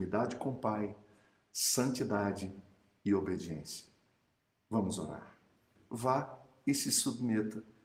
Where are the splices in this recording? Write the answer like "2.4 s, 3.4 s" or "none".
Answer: 5.8 s